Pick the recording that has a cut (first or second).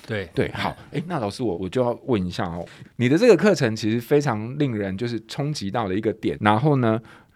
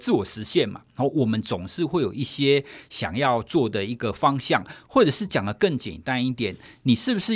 first